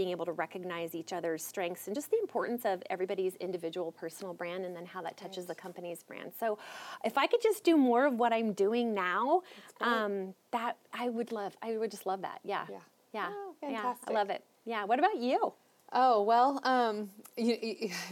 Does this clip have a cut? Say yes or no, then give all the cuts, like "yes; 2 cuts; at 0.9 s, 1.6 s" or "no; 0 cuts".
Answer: no; 0 cuts